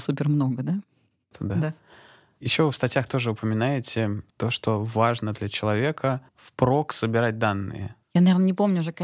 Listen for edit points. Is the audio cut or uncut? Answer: cut